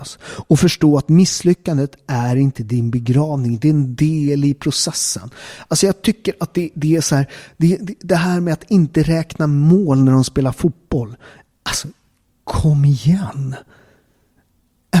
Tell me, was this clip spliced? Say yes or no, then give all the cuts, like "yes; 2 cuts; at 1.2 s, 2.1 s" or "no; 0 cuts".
no; 0 cuts